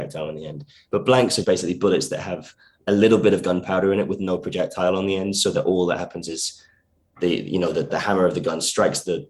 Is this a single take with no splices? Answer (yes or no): no